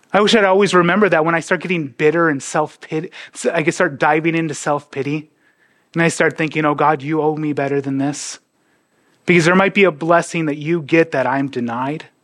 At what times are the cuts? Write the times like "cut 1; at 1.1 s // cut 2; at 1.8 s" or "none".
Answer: none